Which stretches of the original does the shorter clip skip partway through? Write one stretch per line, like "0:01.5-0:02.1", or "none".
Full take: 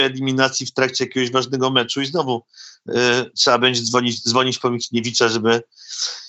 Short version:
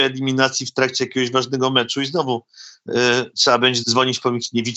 0:03.8-0:04.2